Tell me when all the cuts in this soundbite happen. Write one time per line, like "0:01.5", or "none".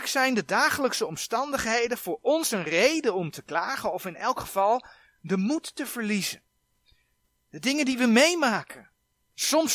none